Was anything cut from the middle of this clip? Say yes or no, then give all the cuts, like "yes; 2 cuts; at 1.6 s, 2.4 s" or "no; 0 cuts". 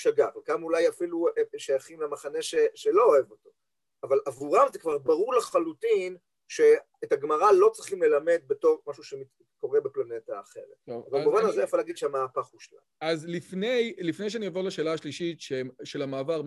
no; 0 cuts